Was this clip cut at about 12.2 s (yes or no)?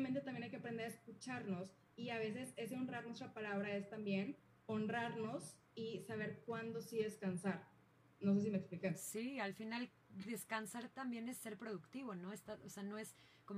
no